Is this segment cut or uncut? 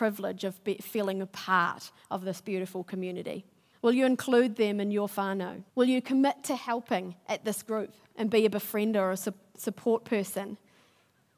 cut